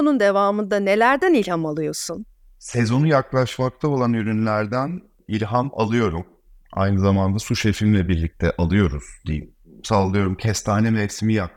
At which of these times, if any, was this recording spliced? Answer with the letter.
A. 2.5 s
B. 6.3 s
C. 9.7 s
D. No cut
D